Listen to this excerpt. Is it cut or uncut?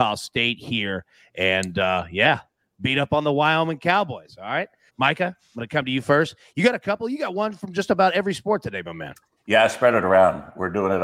cut